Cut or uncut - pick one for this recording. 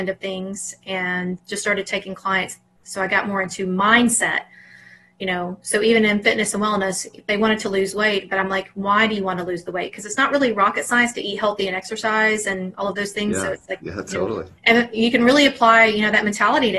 cut